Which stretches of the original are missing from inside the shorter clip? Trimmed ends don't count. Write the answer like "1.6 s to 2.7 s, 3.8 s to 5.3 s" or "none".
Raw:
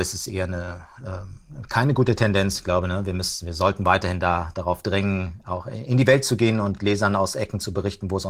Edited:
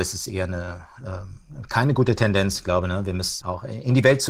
3.4 s to 5.4 s